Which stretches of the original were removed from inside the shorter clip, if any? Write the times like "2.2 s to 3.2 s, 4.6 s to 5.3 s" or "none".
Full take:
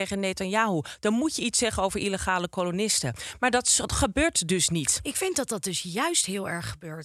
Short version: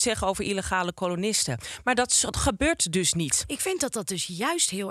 none

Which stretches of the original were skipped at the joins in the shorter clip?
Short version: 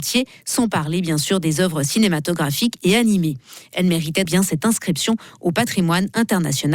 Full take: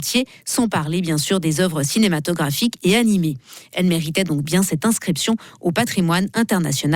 4.2 s to 4.4 s

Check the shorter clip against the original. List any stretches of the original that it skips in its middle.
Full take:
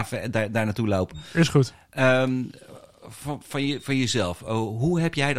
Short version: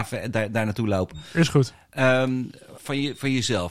2.8 s to 3.4 s

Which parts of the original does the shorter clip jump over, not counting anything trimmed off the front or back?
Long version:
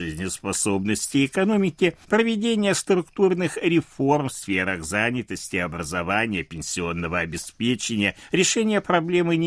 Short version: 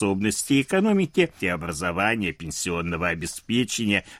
2.0 s to 5.5 s

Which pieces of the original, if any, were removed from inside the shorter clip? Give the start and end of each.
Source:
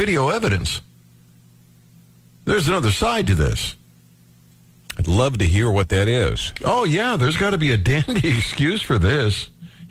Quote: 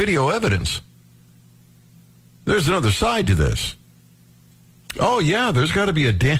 4.9 s to 6.6 s

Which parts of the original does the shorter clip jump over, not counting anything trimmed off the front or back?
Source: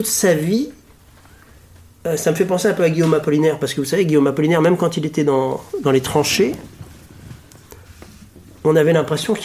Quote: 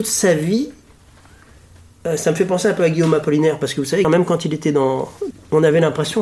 4.0 s to 4.6 s, 5.8 s to 8.4 s

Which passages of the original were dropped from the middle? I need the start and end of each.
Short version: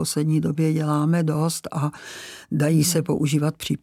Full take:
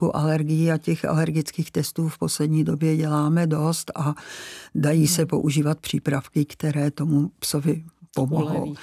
none

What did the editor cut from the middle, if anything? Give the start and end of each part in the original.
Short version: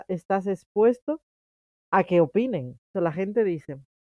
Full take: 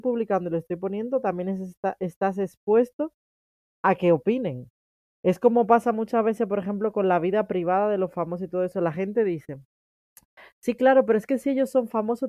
4.9 s to 8.7 s

